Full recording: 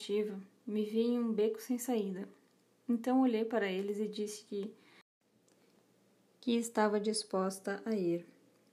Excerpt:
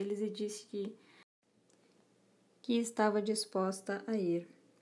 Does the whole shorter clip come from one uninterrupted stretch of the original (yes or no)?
yes